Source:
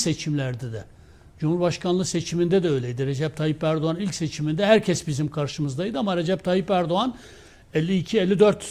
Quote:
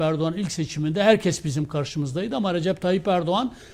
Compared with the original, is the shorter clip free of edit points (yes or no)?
yes